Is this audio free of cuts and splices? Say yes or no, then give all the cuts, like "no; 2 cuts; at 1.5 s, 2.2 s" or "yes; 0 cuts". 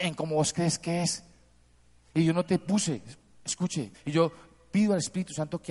no; 1 cut; at 3.9 s